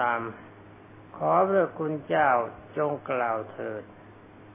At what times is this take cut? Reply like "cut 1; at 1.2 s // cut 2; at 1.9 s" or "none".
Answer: cut 1; at 1.1 s

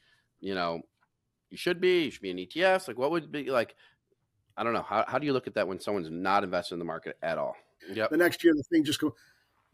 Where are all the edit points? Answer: cut 1; at 7.8 s

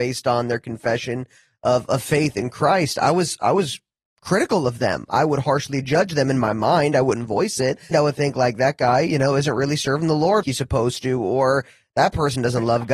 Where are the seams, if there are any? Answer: cut 1; at 7.9 s // cut 2; at 10.4 s

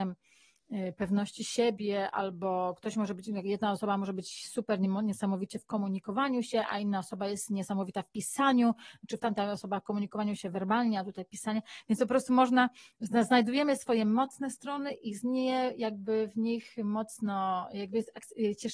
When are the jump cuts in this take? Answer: none

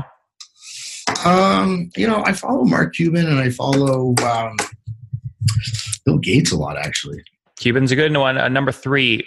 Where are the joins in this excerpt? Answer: none

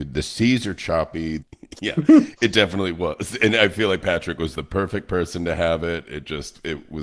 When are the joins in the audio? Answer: cut 1; at 1.4 s

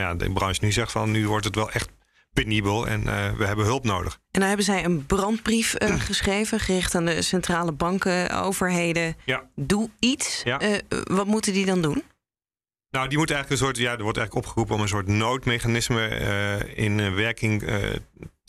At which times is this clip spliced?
none

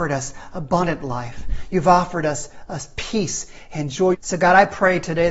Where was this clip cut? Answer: cut 1; at 4.1 s

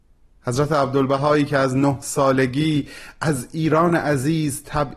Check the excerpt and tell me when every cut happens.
none

